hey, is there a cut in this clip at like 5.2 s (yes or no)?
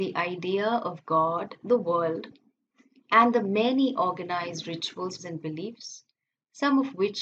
yes